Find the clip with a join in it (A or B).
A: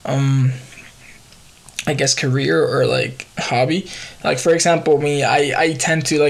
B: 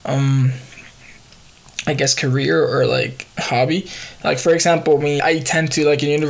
B